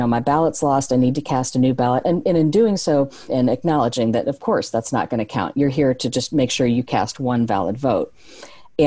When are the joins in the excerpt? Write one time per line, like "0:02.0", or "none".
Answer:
0:03.3